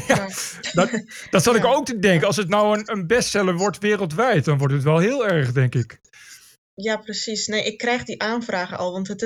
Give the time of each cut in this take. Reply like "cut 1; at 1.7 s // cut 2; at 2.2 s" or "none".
cut 1; at 6.0 s